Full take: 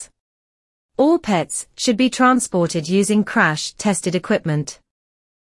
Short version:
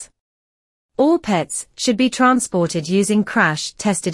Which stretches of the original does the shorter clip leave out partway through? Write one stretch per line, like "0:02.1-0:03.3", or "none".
none